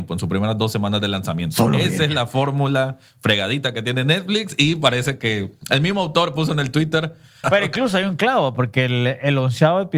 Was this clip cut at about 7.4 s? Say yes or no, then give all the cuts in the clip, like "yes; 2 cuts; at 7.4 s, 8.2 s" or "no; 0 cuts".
yes; 1 cut; at 7.4 s